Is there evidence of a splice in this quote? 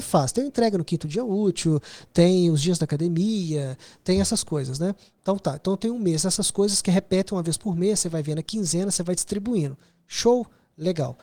yes; 1 cut; at 5.2 s

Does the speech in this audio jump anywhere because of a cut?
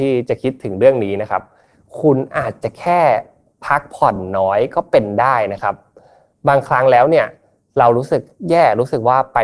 no; 0 cuts

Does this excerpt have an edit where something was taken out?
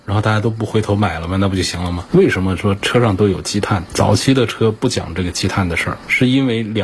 yes; 1 cut; at 2.1 s

